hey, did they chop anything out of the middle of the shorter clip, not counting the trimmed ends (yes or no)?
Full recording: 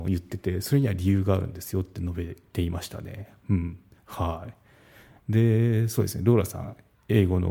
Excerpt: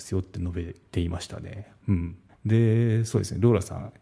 yes